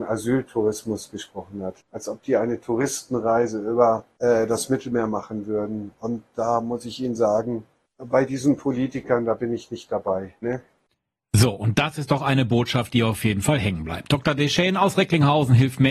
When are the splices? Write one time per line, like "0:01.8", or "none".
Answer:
0:10.4